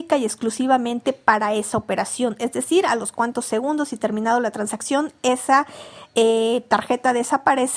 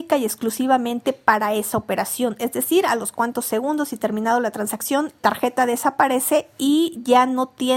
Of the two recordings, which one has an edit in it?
second; 1 cut; at 5.2 s

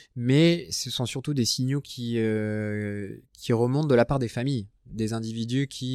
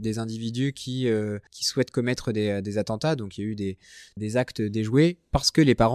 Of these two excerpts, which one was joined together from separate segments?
second; 2 cuts; at 1.5 s, 4.2 s

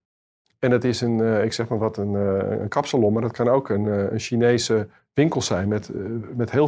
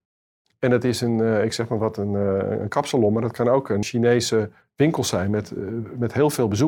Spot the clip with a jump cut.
second; 1 cut; at 3.8 s

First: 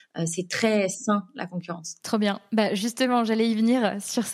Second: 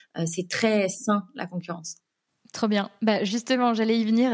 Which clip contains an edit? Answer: first; 1 cut; at 2.0 s

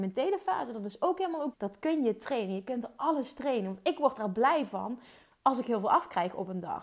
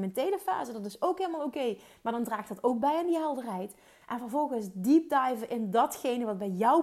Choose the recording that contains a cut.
first; 1 cut; at 1.5 s

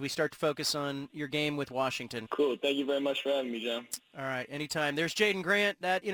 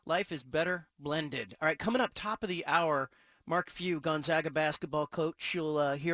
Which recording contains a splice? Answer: first; 1 cut; at 2.3 s

